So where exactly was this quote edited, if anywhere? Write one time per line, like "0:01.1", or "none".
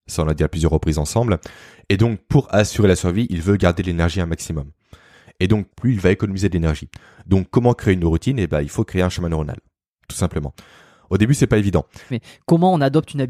0:05.7
0:12.1